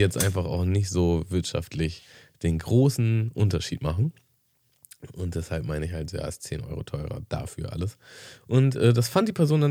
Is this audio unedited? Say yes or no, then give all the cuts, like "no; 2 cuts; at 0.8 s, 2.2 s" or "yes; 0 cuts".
yes; 0 cuts